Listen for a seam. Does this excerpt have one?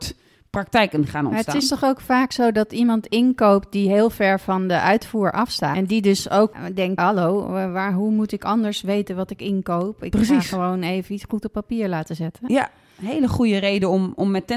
yes; 2 cuts; at 5.7 s, 7.0 s

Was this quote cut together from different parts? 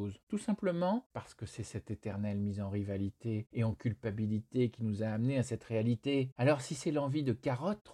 no; 0 cuts

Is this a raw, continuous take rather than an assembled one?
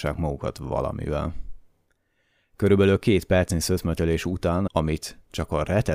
no; 1 cut; at 4.7 s

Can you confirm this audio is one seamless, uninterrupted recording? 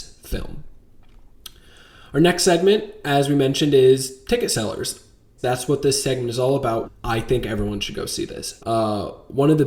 no; 3 cuts; at 5.4 s, 6.8 s, 8.6 s

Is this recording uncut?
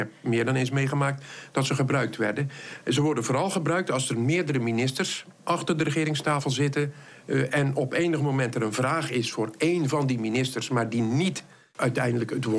yes; 0 cuts

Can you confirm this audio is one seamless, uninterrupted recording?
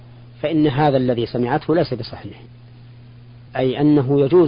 no; 1 cut; at 3.5 s

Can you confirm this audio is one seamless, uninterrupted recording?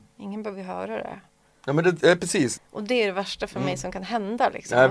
no; 1 cut; at 2.6 s

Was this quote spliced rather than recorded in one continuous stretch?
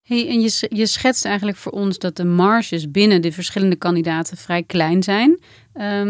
no; 0 cuts

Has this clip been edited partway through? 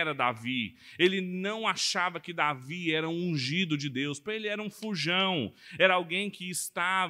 no; 0 cuts

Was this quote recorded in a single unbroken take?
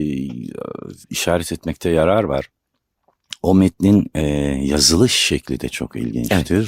no; 1 cut; at 1.0 s

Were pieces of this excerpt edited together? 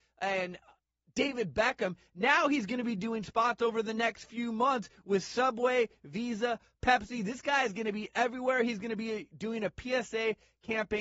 no; 0 cuts

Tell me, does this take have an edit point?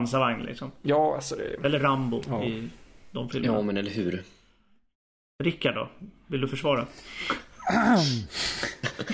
no; 0 cuts

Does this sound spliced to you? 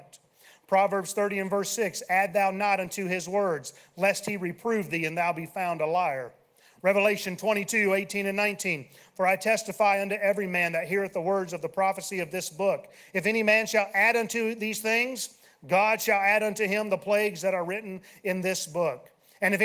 no; 0 cuts

